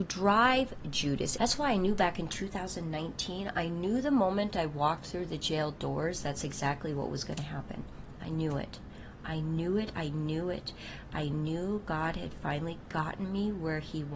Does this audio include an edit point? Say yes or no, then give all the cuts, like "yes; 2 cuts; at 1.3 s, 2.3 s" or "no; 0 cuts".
yes; 1 cut; at 1.4 s